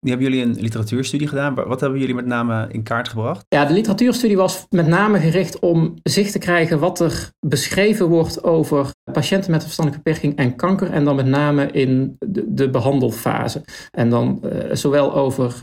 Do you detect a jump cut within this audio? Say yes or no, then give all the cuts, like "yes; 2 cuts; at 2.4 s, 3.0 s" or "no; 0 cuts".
no; 0 cuts